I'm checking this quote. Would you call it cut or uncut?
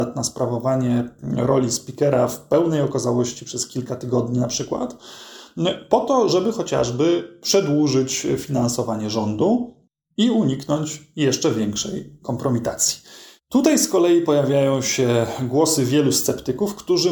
uncut